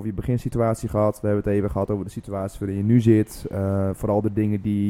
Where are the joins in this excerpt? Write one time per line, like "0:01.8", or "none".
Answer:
none